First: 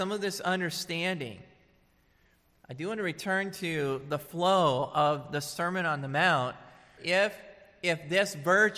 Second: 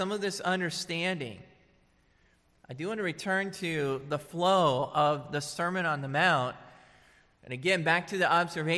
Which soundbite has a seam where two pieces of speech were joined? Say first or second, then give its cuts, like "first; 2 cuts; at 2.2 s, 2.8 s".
first; 1 cut; at 7.0 s